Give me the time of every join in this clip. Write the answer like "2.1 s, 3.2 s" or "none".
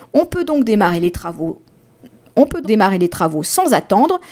2.6 s